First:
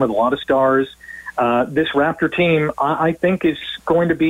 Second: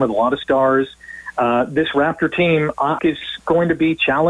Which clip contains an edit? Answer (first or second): second